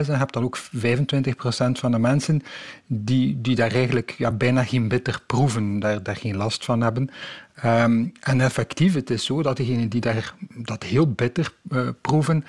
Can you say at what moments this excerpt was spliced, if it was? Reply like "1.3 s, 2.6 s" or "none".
none